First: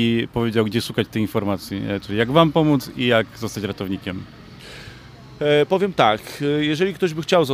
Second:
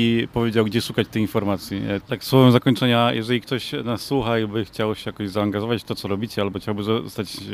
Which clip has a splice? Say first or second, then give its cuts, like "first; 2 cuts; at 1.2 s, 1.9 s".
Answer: second; 1 cut; at 2.0 s